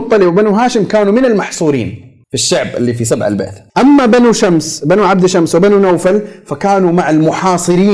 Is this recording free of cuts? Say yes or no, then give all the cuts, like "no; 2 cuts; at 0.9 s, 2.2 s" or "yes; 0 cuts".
no; 2 cuts; at 2.2 s, 3.7 s